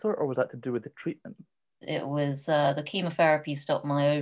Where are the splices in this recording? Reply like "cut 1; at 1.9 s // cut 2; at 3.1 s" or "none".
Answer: cut 1; at 1.8 s

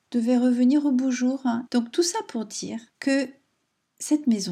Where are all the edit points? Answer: cut 1; at 1.7 s // cut 2; at 2.9 s

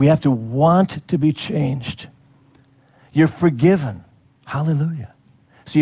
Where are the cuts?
none

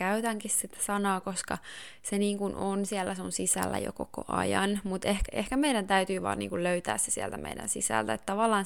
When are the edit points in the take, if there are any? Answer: cut 1; at 5.3 s

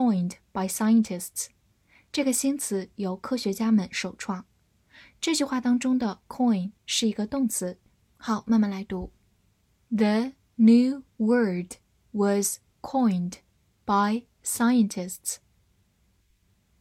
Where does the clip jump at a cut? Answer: cut 1; at 8.0 s

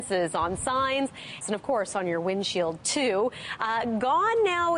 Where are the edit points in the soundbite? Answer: cut 1; at 1.4 s

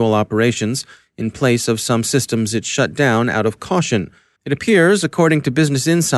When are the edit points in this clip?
cut 1; at 4.4 s

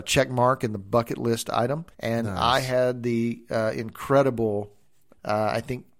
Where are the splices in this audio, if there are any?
cut 1; at 1.9 s // cut 2; at 5.1 s

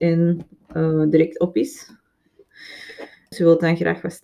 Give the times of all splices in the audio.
cut 1; at 3.3 s

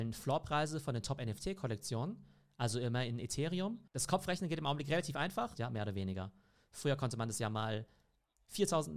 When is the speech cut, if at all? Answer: cut 1; at 5.5 s

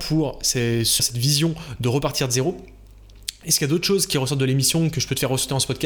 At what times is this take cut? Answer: cut 1; at 1.0 s

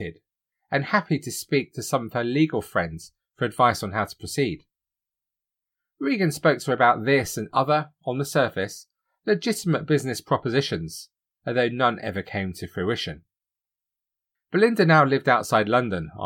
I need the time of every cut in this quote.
none

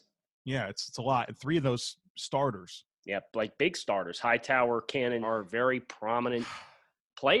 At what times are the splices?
cut 1; at 5.2 s

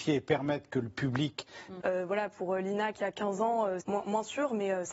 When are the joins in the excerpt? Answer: cut 1; at 1.8 s // cut 2; at 3.8 s

